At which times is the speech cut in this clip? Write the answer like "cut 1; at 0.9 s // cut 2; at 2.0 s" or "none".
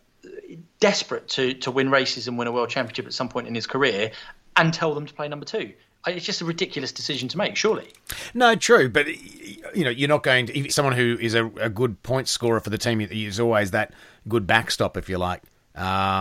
cut 1; at 10.7 s